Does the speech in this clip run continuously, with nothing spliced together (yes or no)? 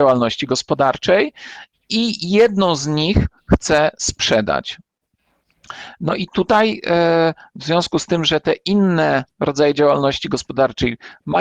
yes